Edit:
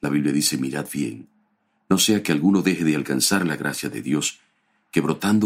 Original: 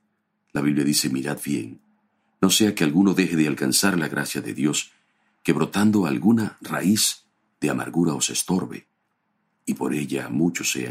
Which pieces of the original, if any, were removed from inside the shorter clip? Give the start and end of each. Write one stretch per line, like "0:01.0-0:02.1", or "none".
none

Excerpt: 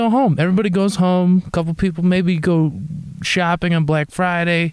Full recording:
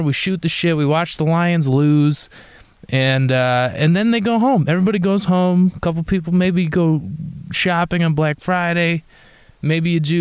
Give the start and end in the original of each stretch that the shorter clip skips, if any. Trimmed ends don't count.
none

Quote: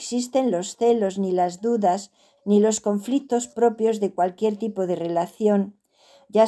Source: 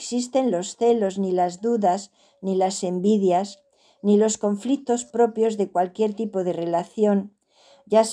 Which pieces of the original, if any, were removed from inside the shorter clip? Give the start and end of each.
0:02.4-0:03.9

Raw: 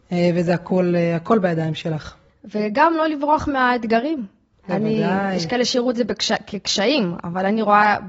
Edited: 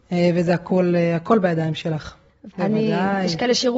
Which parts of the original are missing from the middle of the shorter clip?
0:02.5-0:04.6

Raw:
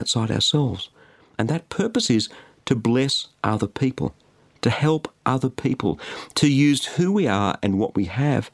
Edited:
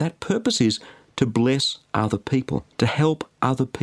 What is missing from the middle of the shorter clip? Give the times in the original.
0:04.2-0:04.6

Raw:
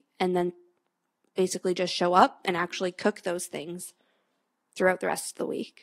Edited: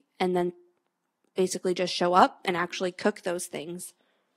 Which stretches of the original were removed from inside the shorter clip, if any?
none

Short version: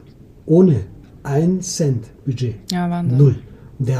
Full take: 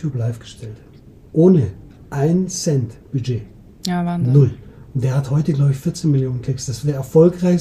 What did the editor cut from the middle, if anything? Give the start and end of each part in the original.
0:03.5-0:03.8

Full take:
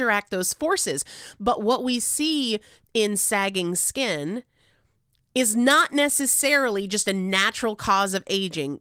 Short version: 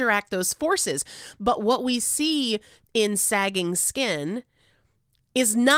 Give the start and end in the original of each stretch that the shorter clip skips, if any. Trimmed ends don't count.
none

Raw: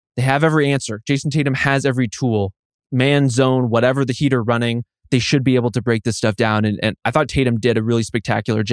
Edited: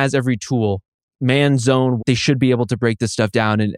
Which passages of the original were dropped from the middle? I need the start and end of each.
0:03.7-0:05.0

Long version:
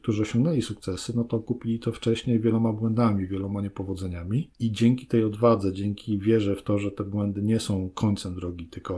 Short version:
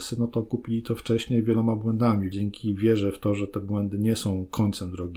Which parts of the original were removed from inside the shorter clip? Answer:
0:03.3-0:05.7

